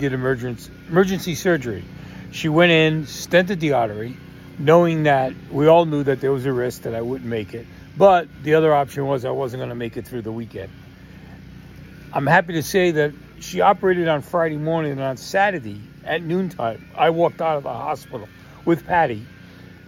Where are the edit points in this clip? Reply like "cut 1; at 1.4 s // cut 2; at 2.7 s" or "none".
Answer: none